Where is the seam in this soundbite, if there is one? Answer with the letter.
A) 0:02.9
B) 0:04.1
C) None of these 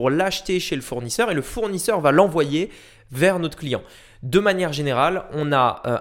C